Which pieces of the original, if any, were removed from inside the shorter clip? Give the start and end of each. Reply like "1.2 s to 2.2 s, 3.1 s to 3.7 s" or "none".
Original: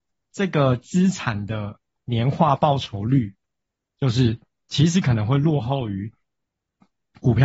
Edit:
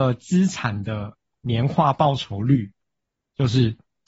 none